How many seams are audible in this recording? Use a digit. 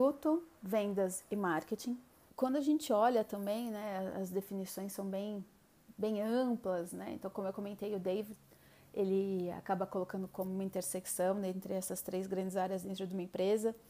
1